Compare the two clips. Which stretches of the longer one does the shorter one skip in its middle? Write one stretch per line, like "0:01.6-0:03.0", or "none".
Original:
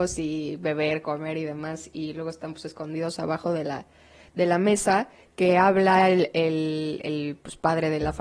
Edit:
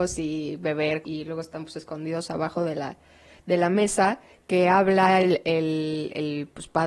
0:01.0-0:01.9